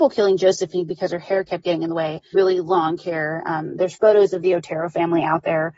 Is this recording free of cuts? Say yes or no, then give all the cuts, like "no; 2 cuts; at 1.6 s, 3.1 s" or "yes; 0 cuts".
no; 1 cut; at 2.3 s